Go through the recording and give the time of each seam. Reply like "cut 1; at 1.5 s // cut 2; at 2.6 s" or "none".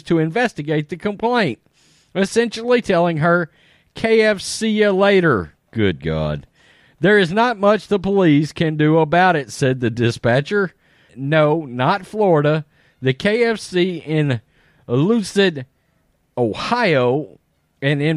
cut 1; at 11.1 s